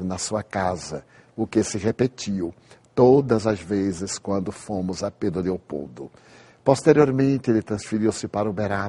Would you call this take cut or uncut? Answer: uncut